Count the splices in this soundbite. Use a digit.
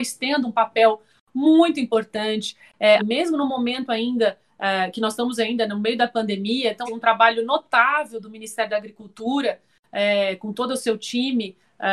2